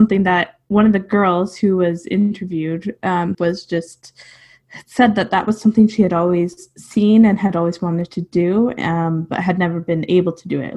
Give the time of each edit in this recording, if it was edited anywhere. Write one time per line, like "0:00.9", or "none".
0:03.3